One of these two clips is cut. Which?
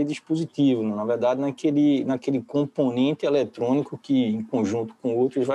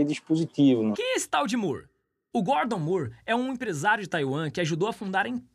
second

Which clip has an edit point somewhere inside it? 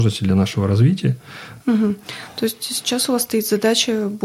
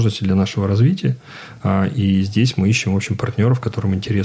first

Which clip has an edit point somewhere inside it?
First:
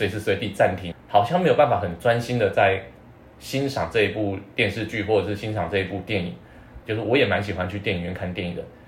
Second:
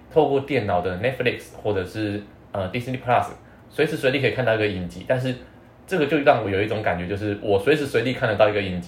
first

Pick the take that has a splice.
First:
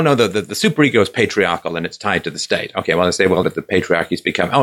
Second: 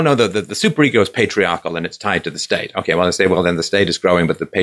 first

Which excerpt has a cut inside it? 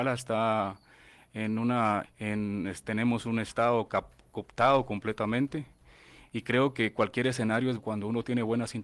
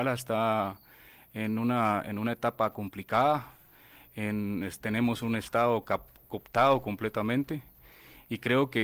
first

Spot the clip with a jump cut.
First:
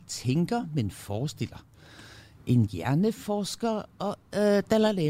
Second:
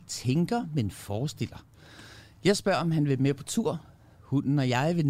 first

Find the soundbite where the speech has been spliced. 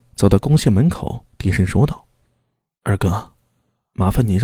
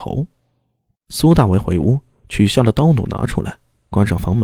second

